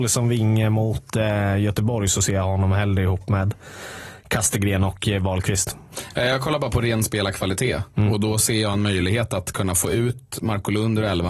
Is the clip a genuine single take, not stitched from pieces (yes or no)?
yes